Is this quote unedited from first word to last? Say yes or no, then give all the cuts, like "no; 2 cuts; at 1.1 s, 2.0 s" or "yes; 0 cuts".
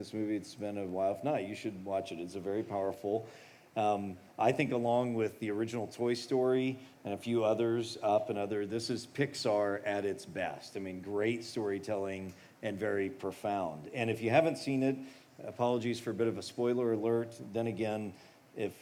yes; 0 cuts